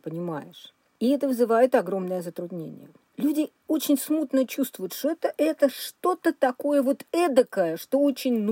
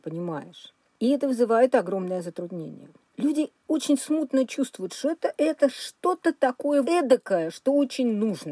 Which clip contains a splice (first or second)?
second